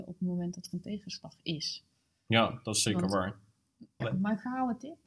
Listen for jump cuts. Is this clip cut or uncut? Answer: cut